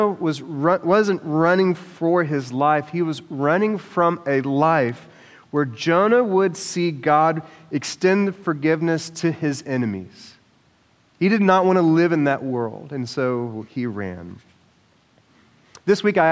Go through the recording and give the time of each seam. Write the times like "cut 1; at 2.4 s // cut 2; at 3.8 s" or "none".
none